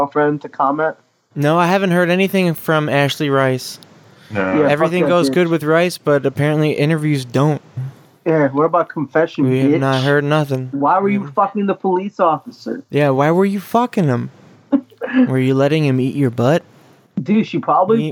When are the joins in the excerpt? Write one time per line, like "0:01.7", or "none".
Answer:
none

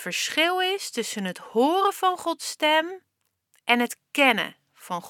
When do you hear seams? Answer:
none

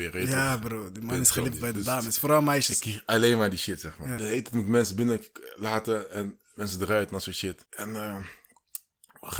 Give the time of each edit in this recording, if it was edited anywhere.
0:04.2
0:07.7

